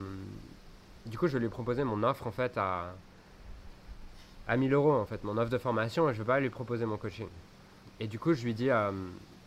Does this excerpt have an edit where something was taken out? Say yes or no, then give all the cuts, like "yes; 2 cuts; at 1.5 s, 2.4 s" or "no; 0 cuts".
no; 0 cuts